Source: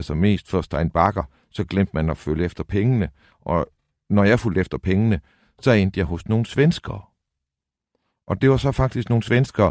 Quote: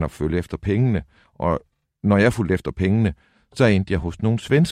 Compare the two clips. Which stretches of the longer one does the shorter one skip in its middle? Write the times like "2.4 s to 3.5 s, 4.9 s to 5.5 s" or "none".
none

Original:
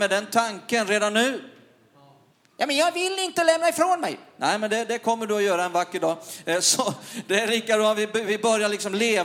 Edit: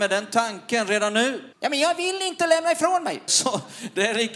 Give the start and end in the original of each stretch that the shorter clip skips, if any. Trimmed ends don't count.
1.5 s to 2.5 s, 4.2 s to 6.6 s

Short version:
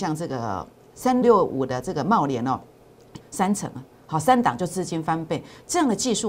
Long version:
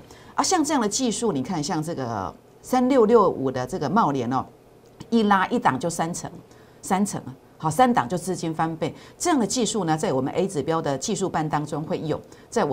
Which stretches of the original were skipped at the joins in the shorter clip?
2.9 s to 3.1 s, 5.1 s to 6.7 s

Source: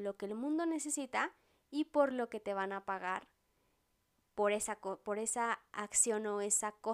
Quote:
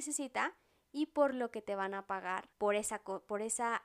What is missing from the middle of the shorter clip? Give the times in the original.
3.3 s to 4.3 s

